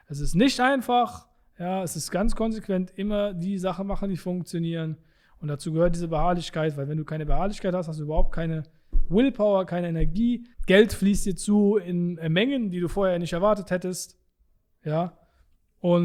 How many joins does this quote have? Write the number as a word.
one